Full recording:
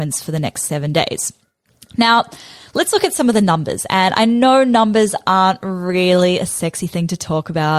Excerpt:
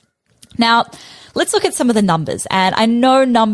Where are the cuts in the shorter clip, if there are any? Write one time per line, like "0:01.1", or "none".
none